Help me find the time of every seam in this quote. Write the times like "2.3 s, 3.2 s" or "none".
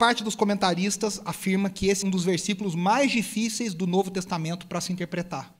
2.0 s